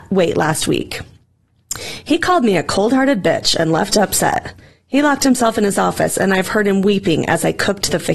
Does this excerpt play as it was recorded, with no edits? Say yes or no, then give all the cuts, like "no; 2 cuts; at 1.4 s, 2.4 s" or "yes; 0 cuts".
yes; 0 cuts